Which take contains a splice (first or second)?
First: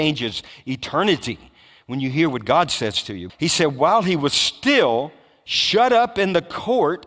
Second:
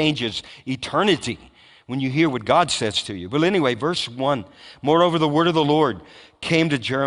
first